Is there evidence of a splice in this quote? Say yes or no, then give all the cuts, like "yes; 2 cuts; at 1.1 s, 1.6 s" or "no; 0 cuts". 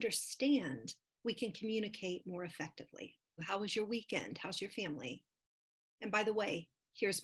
yes; 1 cut; at 3.4 s